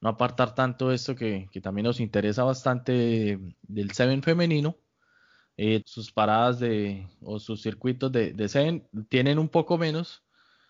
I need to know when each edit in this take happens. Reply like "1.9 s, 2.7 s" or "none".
5.8 s